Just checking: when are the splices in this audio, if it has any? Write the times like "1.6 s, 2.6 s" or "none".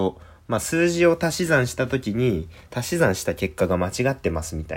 none